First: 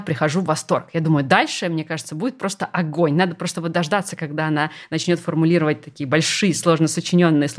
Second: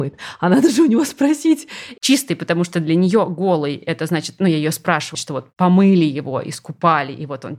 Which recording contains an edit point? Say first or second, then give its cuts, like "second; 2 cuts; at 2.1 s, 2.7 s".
second; 2 cuts; at 2.0 s, 5.1 s